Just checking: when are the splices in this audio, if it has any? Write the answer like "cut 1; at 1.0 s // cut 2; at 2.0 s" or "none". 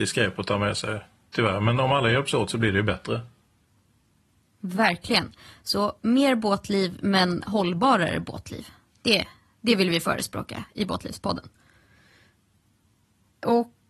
none